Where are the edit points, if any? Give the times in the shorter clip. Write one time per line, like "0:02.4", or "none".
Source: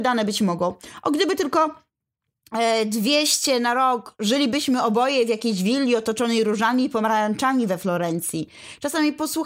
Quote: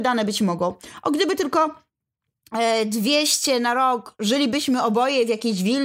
none